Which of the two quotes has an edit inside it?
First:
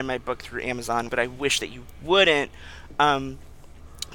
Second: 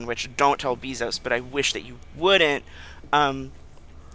first; 1 cut; at 1.1 s

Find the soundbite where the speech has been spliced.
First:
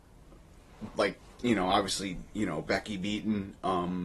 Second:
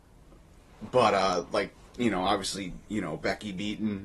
first; 1 cut; at 0.9 s

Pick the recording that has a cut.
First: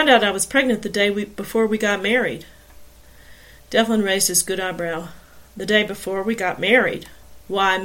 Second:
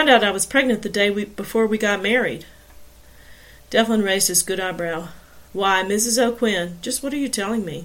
second; 1 cut; at 5.5 s

